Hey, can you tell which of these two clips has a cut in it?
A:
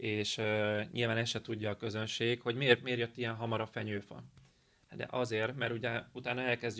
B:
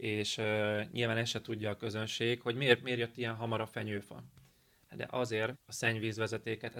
B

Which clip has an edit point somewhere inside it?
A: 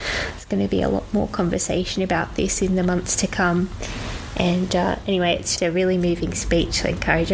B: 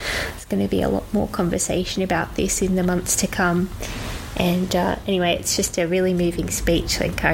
A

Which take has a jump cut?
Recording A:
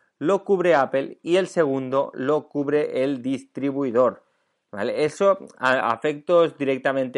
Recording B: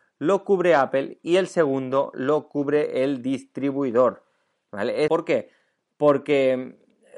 B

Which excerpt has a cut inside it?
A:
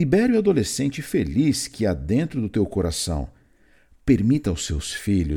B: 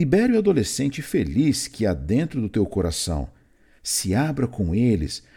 B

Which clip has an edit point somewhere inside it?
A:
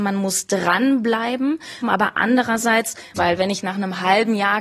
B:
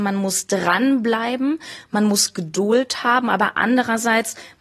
A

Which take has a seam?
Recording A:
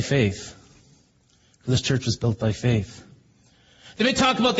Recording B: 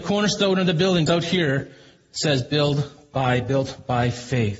B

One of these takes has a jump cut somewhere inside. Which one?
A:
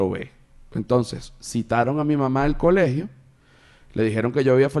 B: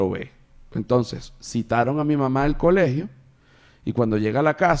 B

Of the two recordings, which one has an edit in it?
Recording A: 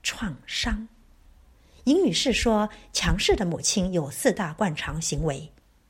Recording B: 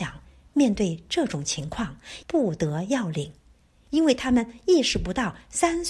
B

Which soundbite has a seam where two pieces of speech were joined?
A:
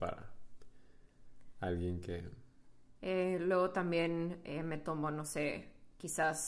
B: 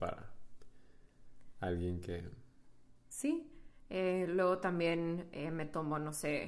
A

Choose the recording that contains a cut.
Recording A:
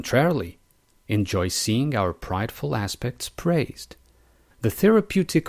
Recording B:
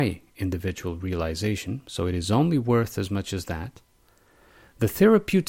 A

